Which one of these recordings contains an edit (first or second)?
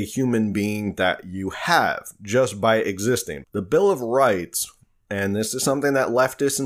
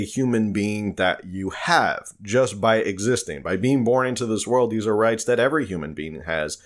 first